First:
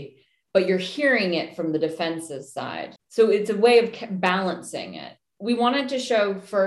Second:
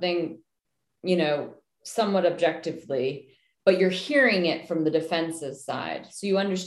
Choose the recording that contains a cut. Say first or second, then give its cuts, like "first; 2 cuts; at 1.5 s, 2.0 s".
first; 2 cuts; at 3.0 s, 5.3 s